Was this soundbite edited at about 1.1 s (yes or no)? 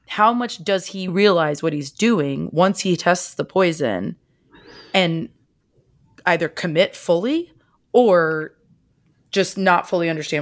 yes